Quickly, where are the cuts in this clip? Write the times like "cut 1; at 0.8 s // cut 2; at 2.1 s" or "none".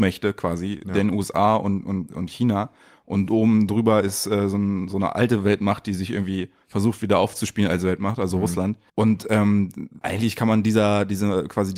cut 1; at 8.9 s // cut 2; at 10.0 s